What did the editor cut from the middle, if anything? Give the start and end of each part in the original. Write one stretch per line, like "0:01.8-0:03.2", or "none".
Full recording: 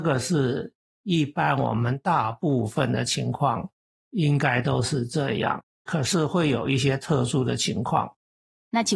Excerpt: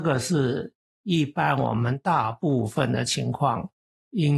none